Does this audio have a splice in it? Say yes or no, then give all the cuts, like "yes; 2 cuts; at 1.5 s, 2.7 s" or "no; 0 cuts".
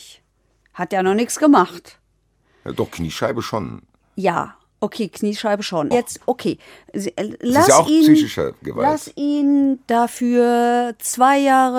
yes; 1 cut; at 5.9 s